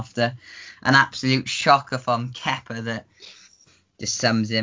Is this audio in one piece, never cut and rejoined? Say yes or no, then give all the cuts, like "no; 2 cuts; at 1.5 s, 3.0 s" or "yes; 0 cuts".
yes; 0 cuts